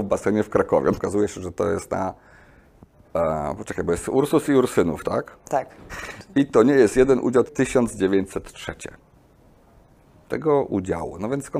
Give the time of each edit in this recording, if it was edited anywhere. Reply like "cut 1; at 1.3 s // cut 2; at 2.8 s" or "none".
cut 1; at 1.0 s // cut 2; at 5.9 s // cut 3; at 7.5 s